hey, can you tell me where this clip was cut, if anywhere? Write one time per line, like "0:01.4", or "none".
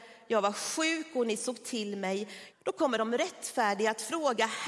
0:02.5